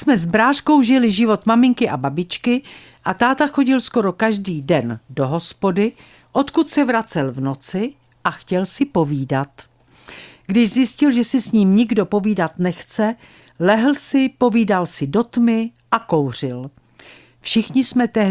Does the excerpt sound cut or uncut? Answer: uncut